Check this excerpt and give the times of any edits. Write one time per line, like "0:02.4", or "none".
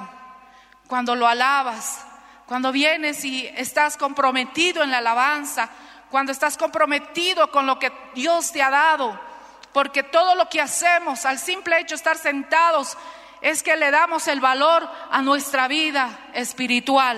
none